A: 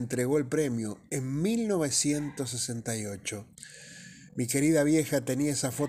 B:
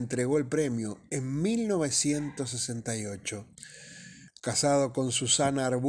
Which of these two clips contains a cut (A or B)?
B